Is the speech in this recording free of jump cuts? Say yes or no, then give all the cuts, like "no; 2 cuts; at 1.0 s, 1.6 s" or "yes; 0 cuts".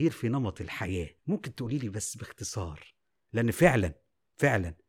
no; 1 cut; at 1.2 s